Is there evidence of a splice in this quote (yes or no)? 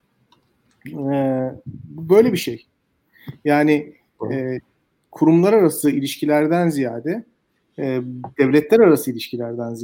no